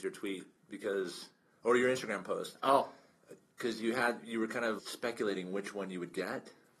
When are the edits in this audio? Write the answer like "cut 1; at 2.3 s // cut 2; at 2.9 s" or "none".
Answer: cut 1; at 4.8 s